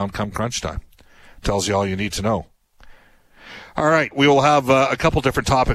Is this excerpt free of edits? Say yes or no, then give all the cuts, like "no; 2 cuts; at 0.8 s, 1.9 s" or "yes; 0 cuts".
no; 1 cut; at 4.1 s